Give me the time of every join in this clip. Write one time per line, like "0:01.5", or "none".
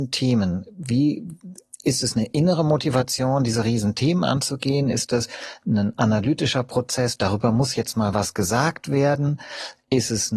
none